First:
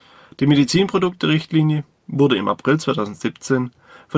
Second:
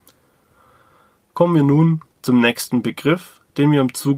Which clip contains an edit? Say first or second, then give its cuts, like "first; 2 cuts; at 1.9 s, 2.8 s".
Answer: second; 1 cut; at 2.1 s